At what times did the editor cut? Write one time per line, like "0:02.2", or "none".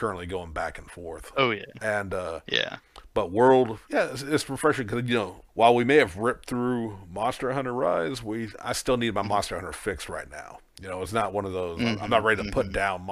0:05.5